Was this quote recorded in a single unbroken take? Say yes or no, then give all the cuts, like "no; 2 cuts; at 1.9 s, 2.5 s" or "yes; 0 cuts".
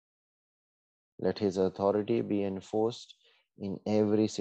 no; 1 cut; at 1.1 s